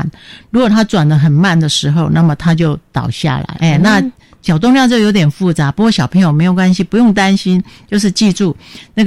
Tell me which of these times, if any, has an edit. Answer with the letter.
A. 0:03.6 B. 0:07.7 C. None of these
A